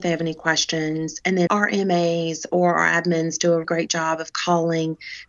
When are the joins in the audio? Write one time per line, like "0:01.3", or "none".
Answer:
0:01.5
0:03.6